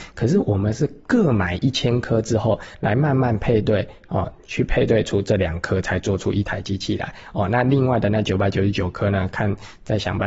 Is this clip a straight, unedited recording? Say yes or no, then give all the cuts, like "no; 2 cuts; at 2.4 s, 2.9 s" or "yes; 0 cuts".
yes; 0 cuts